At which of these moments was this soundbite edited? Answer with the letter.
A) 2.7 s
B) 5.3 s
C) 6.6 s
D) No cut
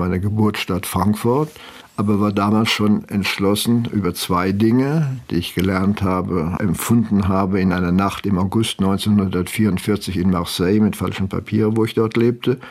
C